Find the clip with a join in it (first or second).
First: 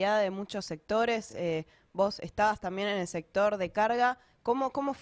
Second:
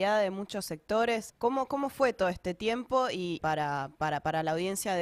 second